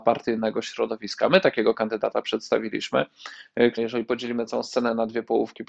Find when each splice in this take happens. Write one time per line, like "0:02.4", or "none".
0:03.8